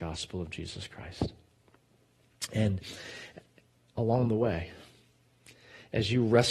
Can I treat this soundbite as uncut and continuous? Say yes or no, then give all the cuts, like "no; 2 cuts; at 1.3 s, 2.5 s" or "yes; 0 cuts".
yes; 0 cuts